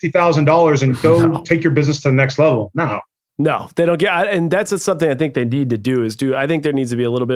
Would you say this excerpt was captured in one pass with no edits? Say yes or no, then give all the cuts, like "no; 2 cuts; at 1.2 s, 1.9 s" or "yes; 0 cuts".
yes; 0 cuts